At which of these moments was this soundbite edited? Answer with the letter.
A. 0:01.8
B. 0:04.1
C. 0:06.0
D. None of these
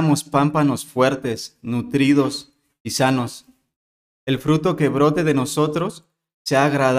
D